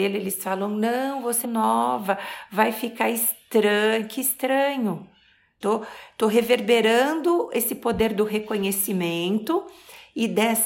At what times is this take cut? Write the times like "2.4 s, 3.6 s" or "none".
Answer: 1.4 s, 5.6 s